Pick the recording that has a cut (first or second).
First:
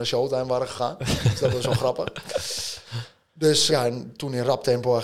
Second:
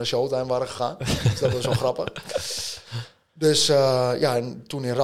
first